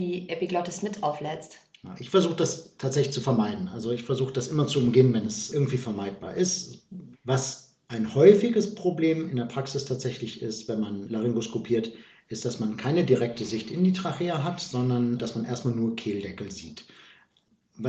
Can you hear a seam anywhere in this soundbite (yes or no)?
yes